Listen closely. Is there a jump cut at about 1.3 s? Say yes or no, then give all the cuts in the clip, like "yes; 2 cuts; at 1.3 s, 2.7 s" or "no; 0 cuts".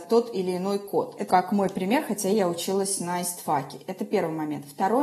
yes; 1 cut; at 1.3 s